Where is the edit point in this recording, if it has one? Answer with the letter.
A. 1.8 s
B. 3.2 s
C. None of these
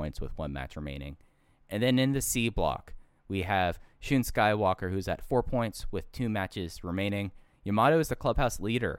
C